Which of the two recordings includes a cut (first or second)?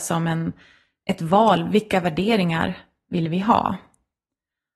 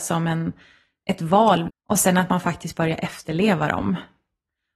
second